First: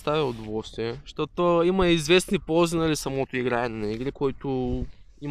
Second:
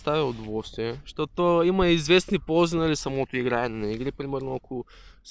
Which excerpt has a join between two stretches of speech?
first; 1 cut; at 4.1 s

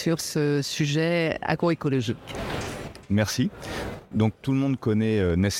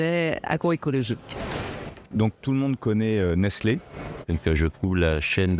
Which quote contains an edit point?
second; 2 cuts; at 2.1 s, 4.2 s

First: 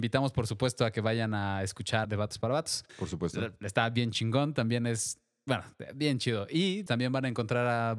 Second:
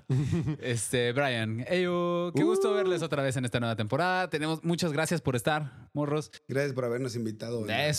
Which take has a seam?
first; 2 cuts; at 2.0 s, 6.9 s

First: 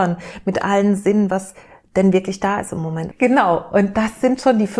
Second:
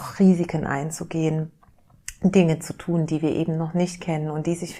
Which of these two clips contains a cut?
first; 1 cut; at 3.1 s

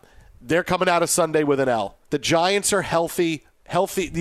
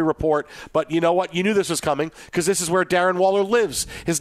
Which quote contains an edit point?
first; 1 cut; at 2.0 s

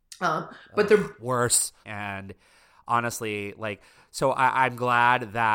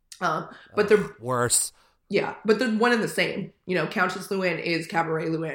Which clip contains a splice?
first; 1 cut; at 1.8 s

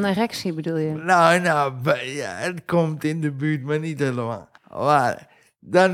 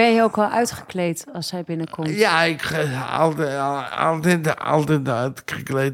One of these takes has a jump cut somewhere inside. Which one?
first; 1 cut; at 4.6 s

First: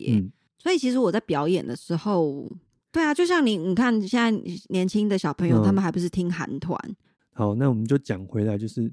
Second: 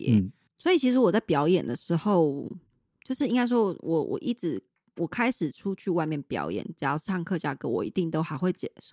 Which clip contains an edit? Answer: first; 2 cuts; at 2.8 s, 7.2 s

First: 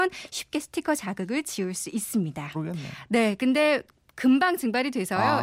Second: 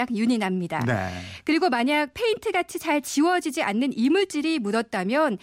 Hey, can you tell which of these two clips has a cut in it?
first; 1 cut; at 2.5 s

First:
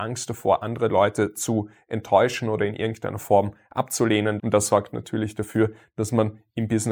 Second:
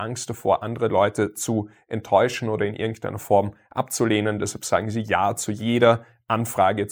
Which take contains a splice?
first; 1 cut; at 4.4 s

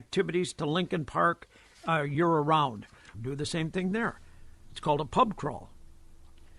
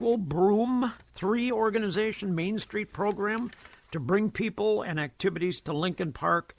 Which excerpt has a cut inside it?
first; 1 cut; at 3.1 s

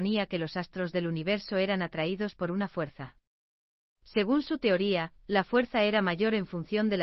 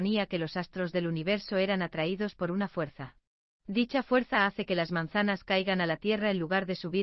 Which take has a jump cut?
second; 1 cut; at 3.5 s

